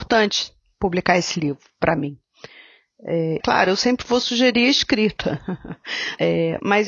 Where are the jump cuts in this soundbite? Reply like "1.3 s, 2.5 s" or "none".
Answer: 3.4 s